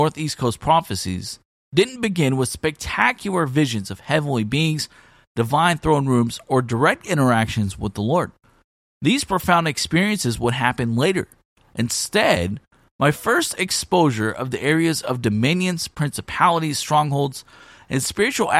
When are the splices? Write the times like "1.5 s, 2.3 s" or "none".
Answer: none